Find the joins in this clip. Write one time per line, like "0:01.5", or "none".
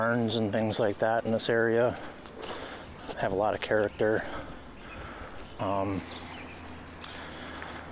0:05.6